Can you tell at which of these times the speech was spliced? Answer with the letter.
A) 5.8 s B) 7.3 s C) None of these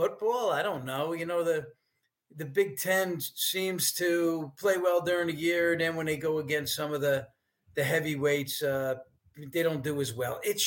C